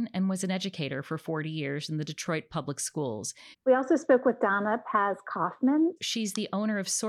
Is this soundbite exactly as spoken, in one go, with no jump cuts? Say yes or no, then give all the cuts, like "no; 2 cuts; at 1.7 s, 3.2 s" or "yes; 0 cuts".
no; 2 cuts; at 3.5 s, 6.0 s